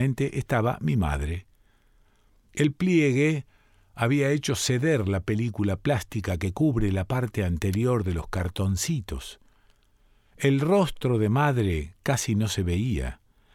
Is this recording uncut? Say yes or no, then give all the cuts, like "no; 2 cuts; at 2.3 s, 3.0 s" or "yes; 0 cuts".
yes; 0 cuts